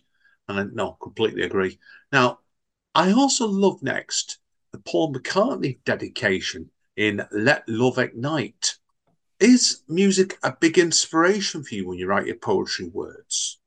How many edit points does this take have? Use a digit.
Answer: 0